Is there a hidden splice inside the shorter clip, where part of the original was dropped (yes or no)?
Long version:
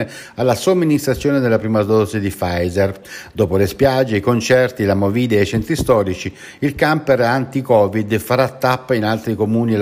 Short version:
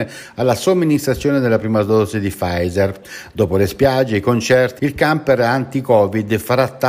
yes